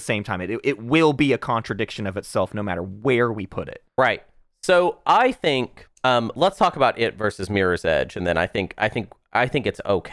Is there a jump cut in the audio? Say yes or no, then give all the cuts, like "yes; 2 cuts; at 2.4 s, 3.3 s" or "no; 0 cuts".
no; 0 cuts